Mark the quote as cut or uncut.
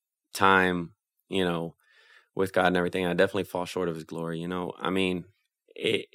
uncut